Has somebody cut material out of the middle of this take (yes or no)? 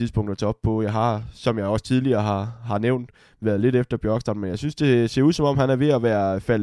no